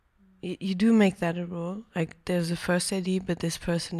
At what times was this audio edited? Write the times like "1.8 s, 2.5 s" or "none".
none